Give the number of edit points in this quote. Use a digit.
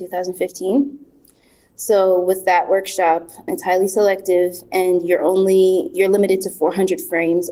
1